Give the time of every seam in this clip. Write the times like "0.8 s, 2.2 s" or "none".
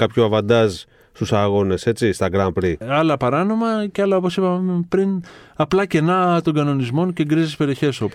2.8 s